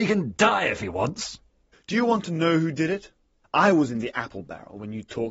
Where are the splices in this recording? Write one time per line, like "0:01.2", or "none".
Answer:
0:01.7
0:03.4